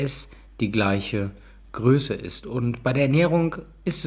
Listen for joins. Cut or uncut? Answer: uncut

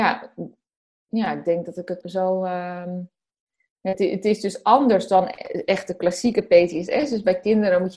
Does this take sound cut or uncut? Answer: cut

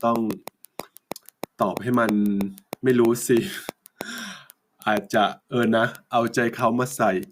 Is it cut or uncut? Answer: cut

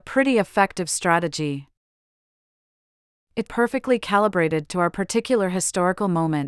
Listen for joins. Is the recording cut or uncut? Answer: cut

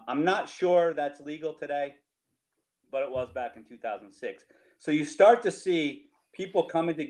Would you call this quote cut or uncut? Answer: uncut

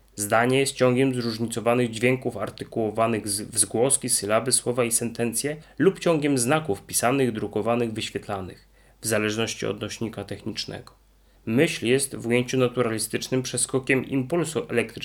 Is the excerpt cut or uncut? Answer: cut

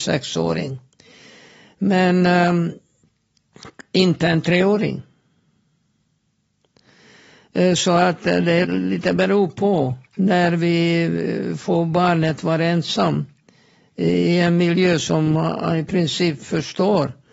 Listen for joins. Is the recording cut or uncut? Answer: cut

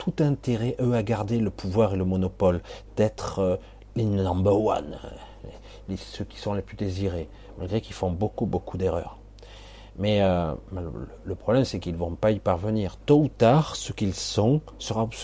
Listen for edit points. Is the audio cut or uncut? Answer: uncut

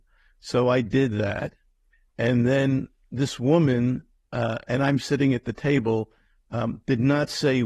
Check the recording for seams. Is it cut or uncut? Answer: uncut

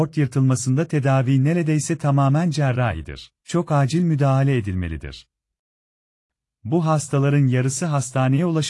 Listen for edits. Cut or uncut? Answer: cut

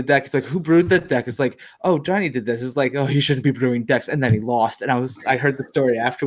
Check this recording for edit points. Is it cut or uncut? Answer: uncut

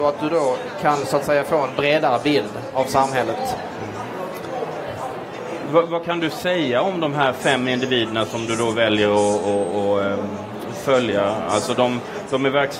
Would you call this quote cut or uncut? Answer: uncut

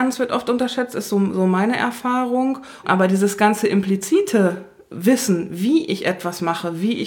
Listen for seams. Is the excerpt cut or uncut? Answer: cut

